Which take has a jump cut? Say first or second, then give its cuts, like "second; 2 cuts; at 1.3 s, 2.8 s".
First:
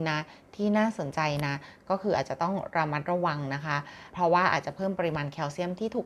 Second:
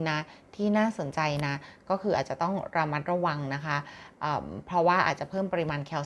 first; 1 cut; at 4.1 s